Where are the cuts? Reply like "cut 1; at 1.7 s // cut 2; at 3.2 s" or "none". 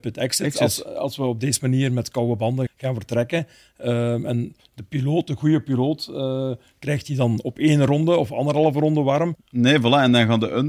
cut 1; at 2.7 s // cut 2; at 9.3 s